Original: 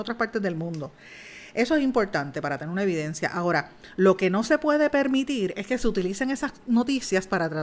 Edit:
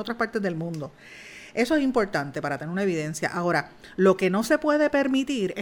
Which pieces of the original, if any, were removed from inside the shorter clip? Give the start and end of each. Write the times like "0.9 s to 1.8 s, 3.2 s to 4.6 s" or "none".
none